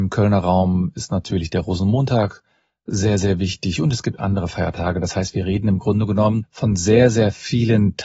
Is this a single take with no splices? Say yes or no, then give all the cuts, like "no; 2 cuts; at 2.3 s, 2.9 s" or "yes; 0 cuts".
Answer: yes; 0 cuts